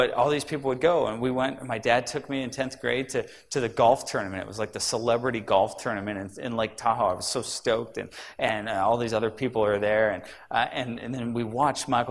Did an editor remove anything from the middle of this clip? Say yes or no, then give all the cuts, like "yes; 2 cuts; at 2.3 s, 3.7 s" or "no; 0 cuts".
no; 0 cuts